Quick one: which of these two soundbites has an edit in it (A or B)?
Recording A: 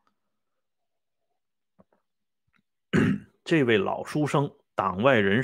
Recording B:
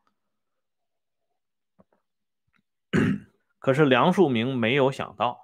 B